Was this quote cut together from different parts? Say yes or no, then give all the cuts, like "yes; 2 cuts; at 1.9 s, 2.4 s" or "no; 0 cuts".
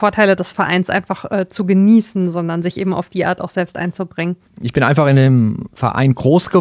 no; 0 cuts